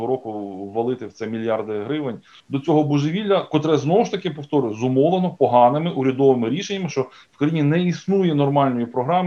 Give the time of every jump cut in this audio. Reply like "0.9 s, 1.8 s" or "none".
2.4 s, 6.9 s